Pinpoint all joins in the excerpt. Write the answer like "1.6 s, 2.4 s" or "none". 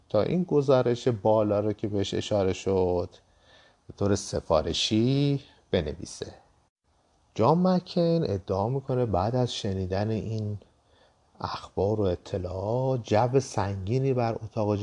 none